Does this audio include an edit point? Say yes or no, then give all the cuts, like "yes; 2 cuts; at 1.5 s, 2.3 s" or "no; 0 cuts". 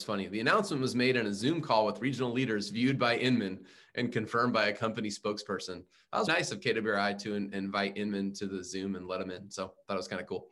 yes; 1 cut; at 6.3 s